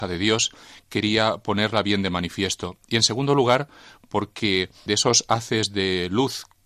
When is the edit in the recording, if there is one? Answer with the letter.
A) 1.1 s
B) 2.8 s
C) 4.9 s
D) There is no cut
C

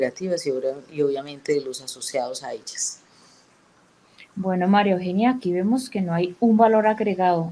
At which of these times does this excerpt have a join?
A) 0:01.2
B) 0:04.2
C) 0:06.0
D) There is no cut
D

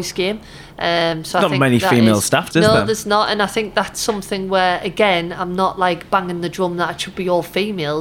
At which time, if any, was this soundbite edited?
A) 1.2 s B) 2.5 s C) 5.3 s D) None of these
B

